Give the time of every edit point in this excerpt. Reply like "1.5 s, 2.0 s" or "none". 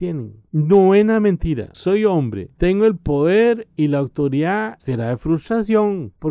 4.8 s